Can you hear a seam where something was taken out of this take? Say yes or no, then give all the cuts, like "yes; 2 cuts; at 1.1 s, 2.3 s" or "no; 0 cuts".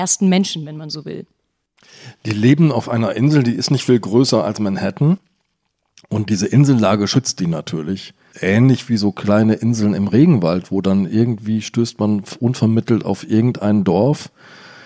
yes; 1 cut; at 8.3 s